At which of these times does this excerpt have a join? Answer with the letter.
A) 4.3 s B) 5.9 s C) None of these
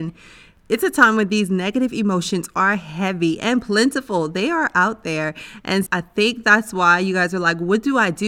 B